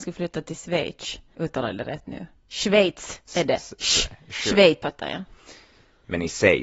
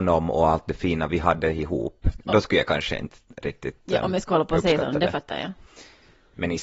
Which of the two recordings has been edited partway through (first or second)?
first